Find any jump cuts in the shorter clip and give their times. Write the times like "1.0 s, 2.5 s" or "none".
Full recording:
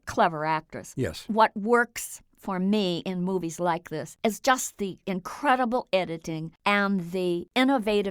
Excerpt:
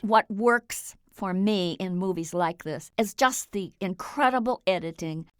none